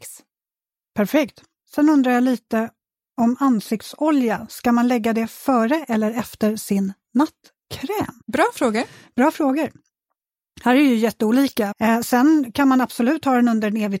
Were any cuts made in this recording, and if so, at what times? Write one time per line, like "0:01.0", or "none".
0:01.7
0:08.2
0:11.7